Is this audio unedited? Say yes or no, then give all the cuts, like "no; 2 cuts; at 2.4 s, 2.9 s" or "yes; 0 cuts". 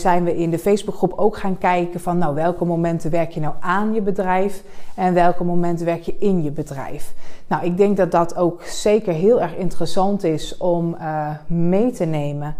yes; 0 cuts